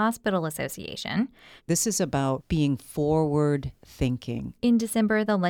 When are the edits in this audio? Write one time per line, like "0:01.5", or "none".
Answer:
0:01.6
0:04.5